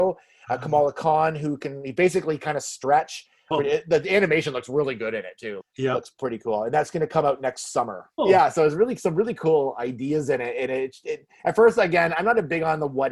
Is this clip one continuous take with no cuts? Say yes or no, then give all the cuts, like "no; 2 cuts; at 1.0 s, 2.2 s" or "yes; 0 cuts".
no; 3 cuts; at 3.5 s, 5.6 s, 8.2 s